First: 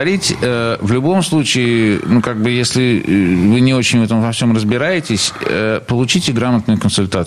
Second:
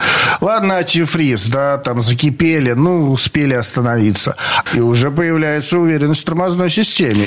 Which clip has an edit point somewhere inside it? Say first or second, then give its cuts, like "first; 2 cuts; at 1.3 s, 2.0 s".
second; 1 cut; at 4.7 s